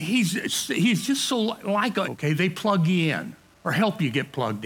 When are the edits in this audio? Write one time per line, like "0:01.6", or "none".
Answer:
0:02.0